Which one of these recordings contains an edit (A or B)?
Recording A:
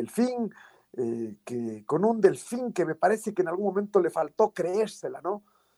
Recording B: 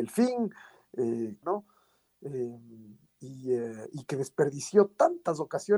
B